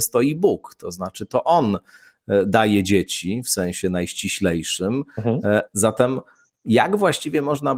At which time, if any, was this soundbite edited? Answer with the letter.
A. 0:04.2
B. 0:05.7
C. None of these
B